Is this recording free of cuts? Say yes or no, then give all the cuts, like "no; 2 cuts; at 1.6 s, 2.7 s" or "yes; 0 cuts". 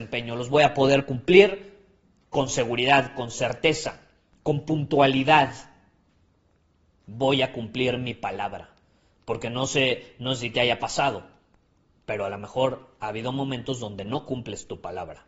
yes; 0 cuts